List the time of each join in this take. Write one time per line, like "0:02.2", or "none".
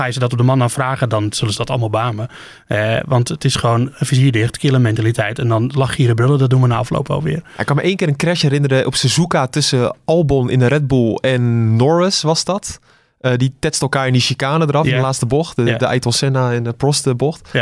none